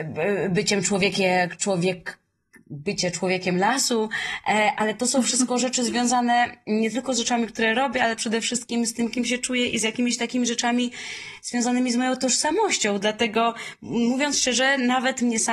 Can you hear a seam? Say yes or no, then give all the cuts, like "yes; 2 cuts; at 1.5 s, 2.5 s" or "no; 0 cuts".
no; 0 cuts